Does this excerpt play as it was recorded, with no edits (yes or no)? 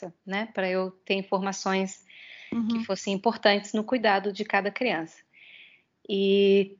yes